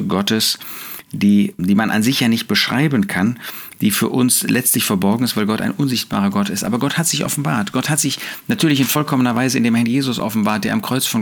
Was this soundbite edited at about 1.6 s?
yes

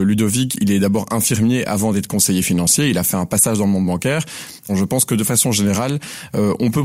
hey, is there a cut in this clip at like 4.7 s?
yes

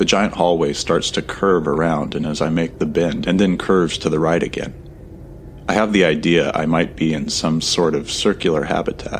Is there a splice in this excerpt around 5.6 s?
no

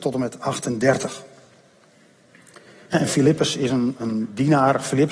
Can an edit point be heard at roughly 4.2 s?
no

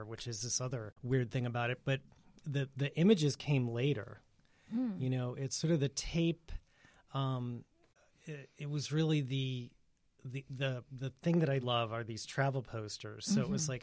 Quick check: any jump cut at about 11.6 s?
yes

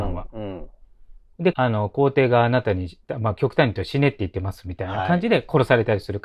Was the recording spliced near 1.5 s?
yes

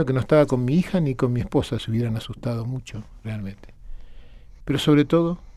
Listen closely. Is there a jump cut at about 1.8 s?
no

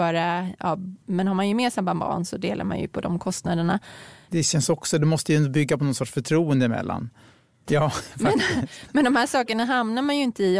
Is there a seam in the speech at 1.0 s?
yes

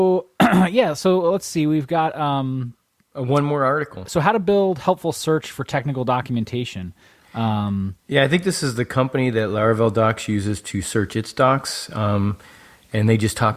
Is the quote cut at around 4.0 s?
yes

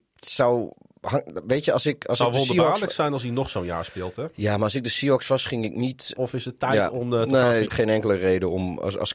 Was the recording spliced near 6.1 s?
yes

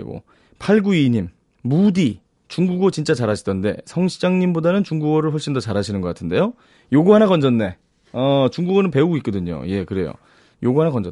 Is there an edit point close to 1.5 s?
yes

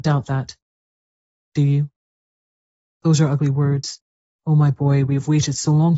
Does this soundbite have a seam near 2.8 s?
yes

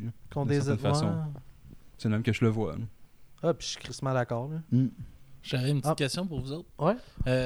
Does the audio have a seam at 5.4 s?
yes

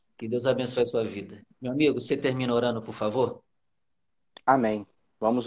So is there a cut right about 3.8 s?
no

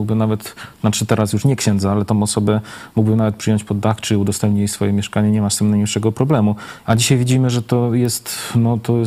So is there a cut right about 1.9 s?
no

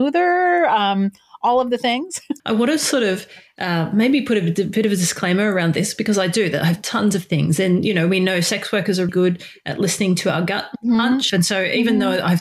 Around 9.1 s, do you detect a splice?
yes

